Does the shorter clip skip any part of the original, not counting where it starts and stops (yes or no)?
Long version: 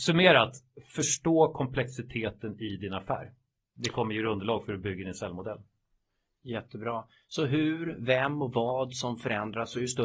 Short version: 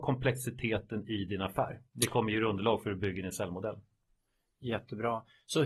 yes